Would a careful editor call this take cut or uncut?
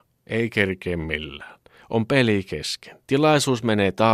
cut